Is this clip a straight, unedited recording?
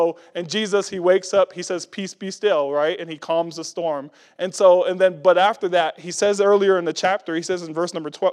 yes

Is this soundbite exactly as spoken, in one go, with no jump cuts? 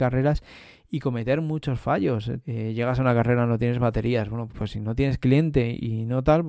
no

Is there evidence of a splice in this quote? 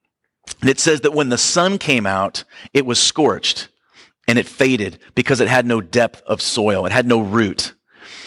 no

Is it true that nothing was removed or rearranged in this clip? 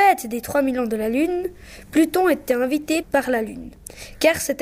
no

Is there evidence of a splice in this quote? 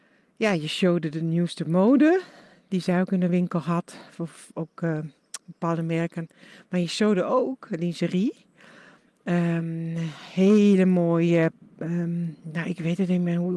no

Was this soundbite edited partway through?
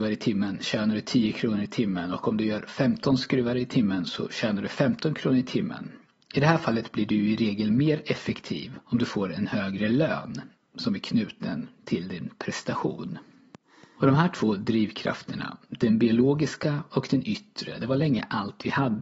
yes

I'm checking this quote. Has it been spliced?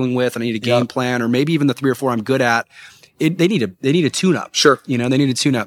no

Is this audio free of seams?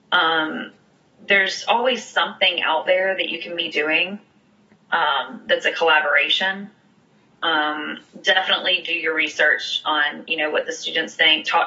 no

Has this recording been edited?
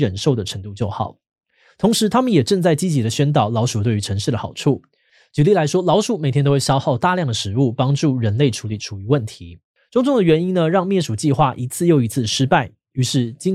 yes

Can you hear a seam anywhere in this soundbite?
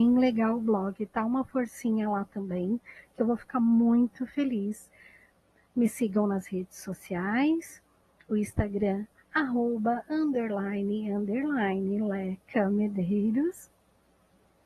no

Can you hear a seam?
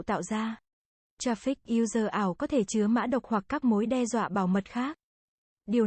yes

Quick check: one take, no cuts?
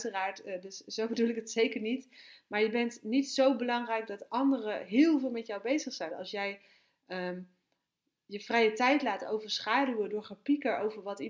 no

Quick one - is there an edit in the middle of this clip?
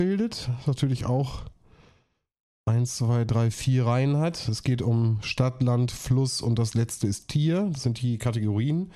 no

